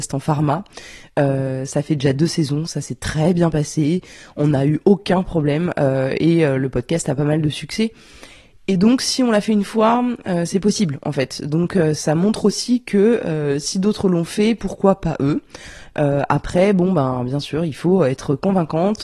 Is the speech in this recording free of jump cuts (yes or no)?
yes